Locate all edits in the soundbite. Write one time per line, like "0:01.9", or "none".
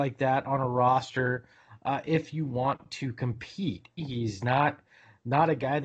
0:04.0